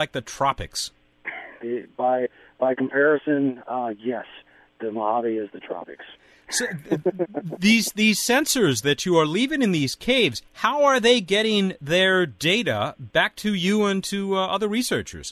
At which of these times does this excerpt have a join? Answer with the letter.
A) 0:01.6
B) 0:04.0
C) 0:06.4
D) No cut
A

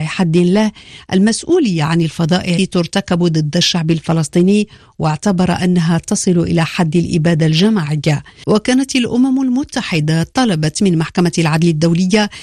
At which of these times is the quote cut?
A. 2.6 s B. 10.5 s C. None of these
A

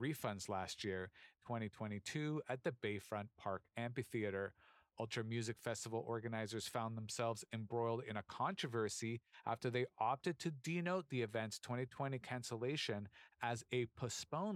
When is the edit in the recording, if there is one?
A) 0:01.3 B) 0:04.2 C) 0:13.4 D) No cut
A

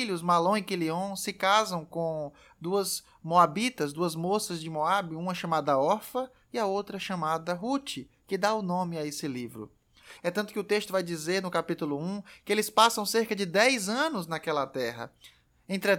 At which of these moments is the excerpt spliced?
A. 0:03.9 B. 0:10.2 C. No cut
B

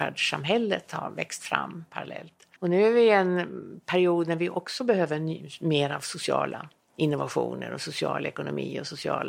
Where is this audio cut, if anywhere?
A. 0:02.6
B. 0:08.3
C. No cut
A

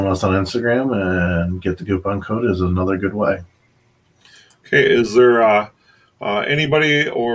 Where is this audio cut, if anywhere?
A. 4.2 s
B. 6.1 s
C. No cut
C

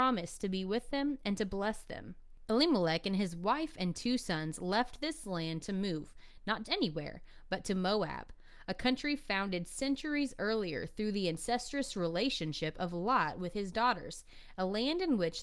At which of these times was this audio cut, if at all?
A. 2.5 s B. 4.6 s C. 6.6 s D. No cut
C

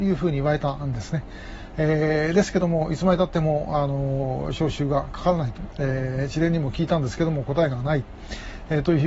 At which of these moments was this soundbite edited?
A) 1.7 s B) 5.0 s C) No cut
C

